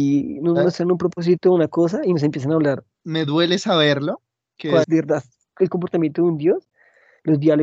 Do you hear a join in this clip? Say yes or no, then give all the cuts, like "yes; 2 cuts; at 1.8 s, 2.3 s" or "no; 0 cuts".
yes; 2 cuts; at 2.9 s, 4.8 s